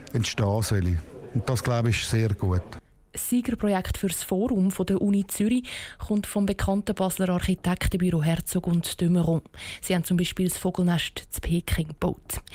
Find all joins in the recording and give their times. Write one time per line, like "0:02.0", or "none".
none

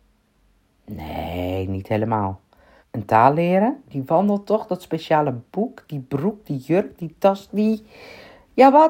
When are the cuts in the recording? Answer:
0:02.8
0:03.9

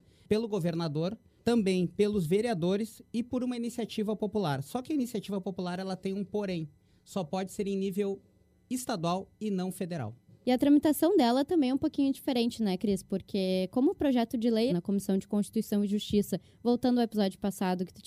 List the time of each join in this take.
0:14.7

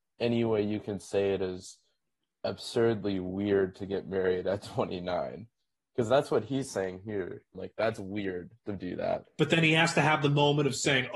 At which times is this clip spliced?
0:07.5
0:09.2

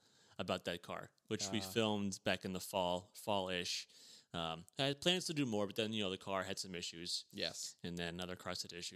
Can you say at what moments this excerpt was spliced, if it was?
none

